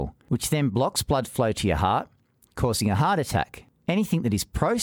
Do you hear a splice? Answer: no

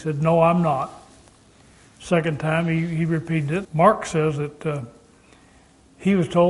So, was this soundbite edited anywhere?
yes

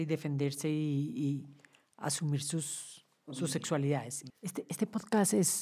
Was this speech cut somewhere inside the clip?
yes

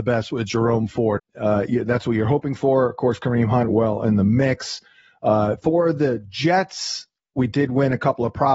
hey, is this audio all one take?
no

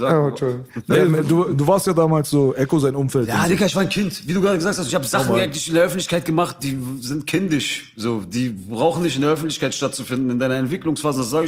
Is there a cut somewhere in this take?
no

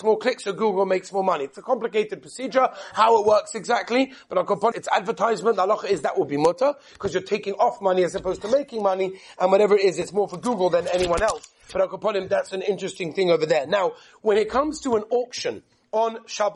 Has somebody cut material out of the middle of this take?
yes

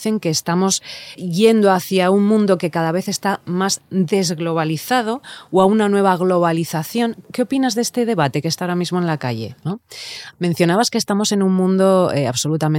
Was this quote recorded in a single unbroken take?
no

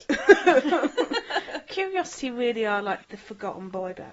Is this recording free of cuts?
no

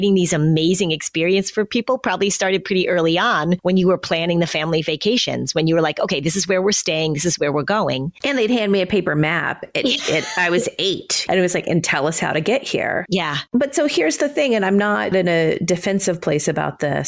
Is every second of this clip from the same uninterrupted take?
yes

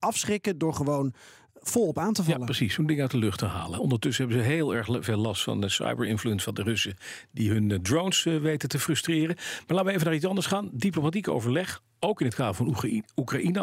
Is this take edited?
no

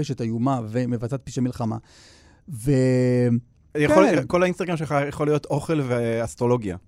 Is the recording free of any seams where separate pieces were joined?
no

